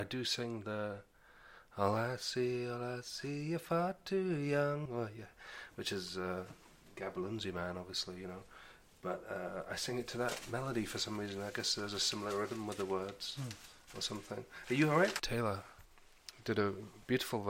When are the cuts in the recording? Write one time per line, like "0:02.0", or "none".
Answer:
0:04.9
0:15.2